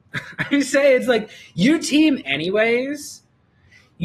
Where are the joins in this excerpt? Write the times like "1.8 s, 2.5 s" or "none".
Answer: 2.2 s

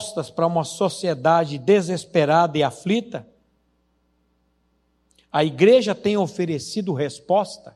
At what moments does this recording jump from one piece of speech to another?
none

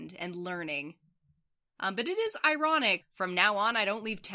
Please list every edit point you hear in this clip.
1.7 s, 3.0 s

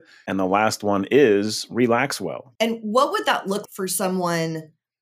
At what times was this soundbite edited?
2.6 s, 3.7 s

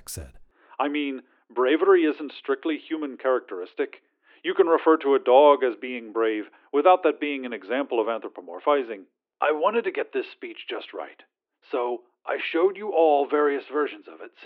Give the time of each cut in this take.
9.3 s

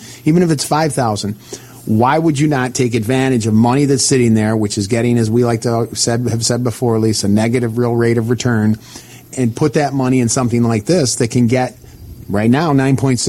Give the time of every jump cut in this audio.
9.3 s

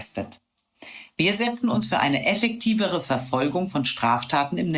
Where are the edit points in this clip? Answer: none

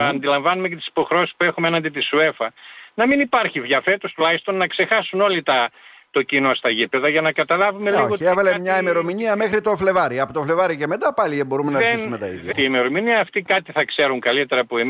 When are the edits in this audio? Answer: 12.5 s

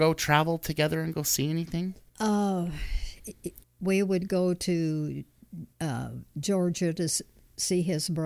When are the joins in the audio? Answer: 2.1 s, 3.6 s, 5.7 s

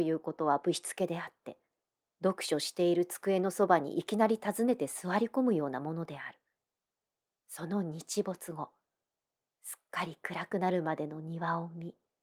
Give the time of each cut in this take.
7.4 s

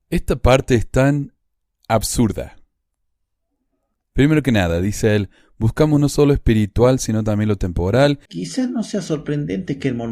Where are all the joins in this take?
8.3 s

